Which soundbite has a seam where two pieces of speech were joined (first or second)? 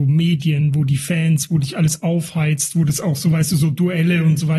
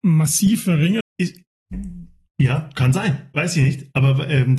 second